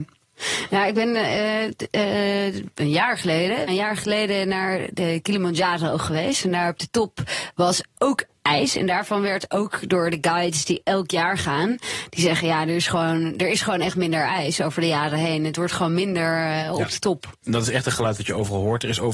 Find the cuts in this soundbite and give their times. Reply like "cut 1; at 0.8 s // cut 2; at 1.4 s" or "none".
cut 1; at 3.7 s